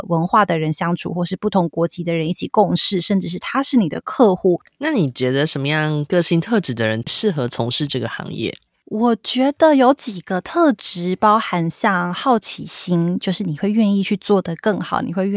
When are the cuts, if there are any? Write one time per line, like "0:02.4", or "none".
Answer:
none